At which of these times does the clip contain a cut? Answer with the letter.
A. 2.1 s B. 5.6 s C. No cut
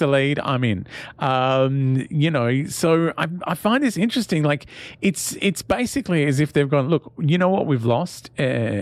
C